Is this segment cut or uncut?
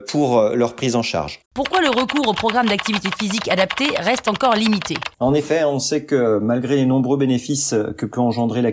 cut